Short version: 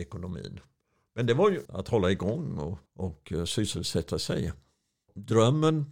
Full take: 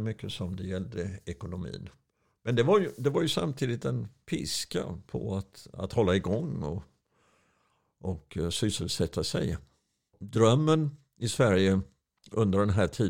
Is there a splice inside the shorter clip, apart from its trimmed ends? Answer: yes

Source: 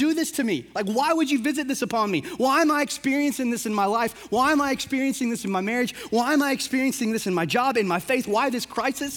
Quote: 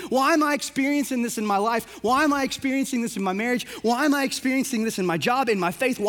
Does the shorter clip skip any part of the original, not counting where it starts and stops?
no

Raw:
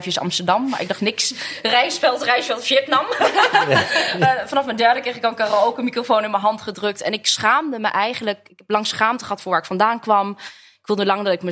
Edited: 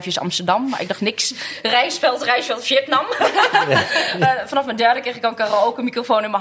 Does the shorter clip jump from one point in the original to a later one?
no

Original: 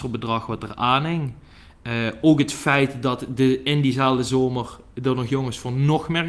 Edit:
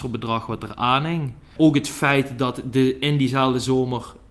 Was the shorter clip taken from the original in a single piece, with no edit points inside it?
no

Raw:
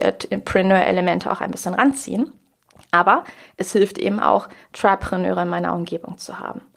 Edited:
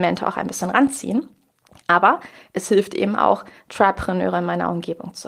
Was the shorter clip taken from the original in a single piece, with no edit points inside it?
yes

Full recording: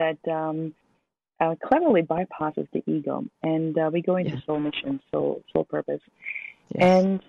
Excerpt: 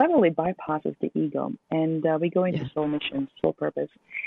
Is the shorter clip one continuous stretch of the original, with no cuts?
no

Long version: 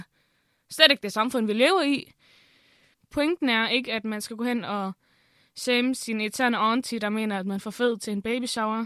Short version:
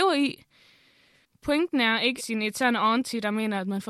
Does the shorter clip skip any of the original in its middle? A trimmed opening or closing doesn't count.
yes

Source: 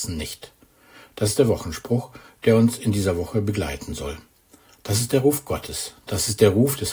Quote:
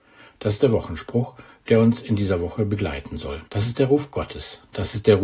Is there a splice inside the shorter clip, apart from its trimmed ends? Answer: yes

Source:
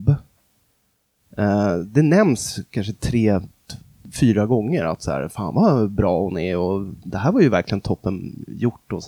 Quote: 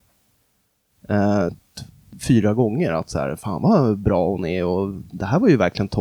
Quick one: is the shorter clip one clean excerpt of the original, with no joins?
no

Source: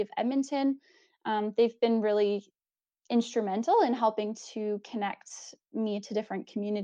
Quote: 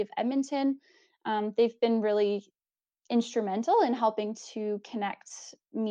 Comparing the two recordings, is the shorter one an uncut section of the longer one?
yes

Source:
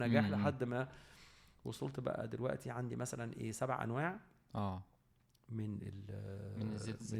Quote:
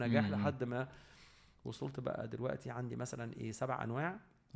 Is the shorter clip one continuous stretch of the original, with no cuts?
yes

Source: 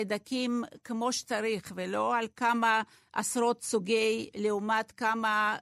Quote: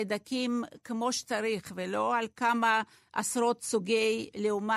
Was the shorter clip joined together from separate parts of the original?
no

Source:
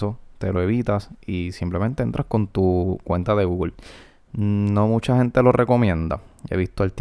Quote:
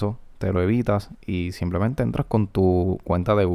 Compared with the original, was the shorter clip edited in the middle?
no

